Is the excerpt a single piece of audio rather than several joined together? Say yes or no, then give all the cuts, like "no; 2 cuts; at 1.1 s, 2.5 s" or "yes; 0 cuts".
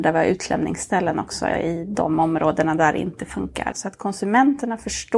no; 1 cut; at 3.7 s